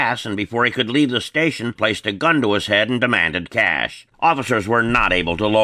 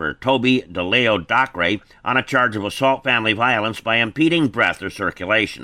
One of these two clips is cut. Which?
first; 2 cuts; at 1.8 s, 4.1 s

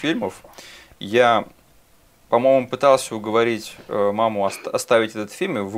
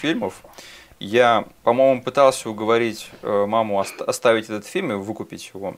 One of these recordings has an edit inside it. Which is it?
second; 1 cut; at 1.6 s

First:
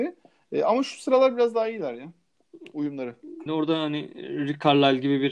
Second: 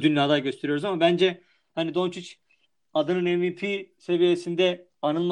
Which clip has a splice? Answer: first; 1 cut; at 3.5 s

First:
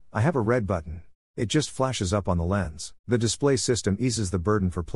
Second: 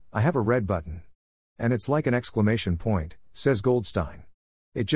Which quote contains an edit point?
first; 2 cuts; at 1.3 s, 3.0 s

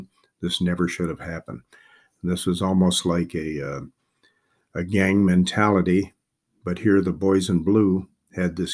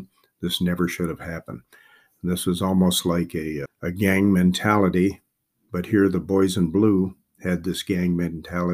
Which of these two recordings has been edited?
second; 1 cut; at 3.6 s

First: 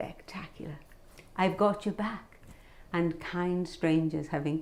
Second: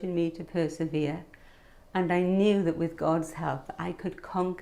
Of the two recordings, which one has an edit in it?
first; 1 cut; at 2.9 s

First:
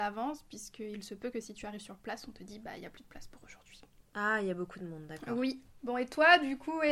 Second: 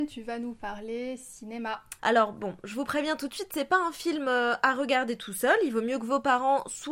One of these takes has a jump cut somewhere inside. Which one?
second; 1 cut; at 2.0 s

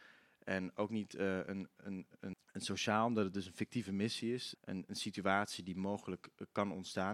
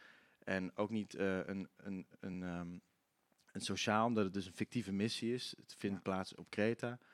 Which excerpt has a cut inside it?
first; 2 cuts; at 2.3 s, 4.5 s

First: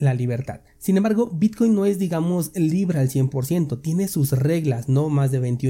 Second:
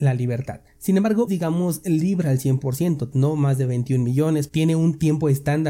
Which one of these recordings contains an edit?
second; 3 cuts; at 1.3 s, 3.1 s, 4.5 s

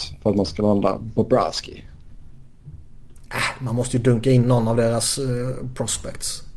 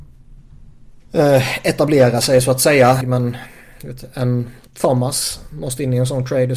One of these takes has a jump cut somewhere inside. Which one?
second; 2 cuts; at 1.0 s, 3.0 s

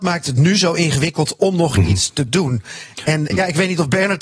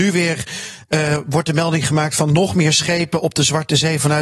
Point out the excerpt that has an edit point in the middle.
first; 1 cut; at 3.3 s

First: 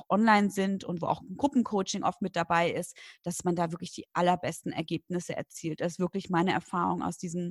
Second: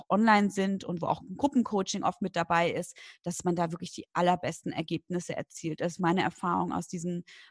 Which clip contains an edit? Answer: second; 1 cut; at 6.0 s

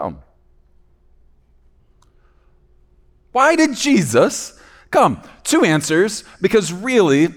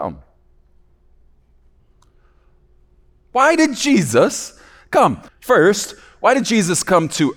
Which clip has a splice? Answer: second; 1 cut; at 5.3 s

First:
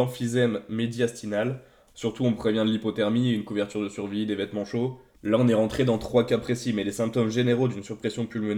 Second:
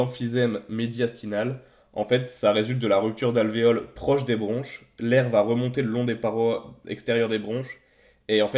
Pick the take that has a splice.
first; 2 cuts; at 1.9 s, 5.1 s

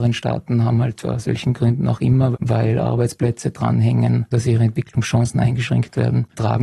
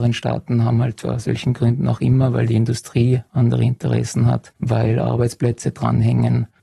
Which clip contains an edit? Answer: first; 2 cuts; at 2.3 s, 4.3 s

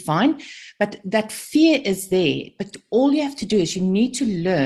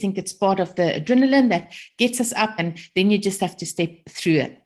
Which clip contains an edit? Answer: second; 1 cut; at 2.6 s

